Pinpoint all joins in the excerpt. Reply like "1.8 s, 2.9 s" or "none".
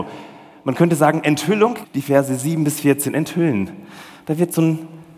1.8 s